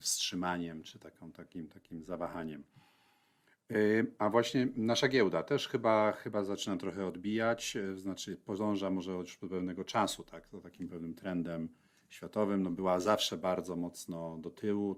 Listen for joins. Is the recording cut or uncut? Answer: uncut